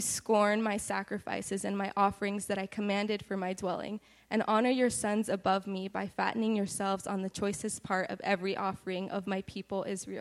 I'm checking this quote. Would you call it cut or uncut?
uncut